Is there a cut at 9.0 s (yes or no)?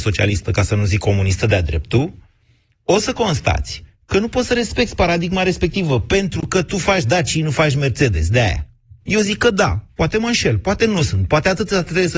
yes